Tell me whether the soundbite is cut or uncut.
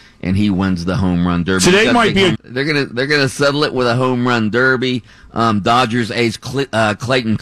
cut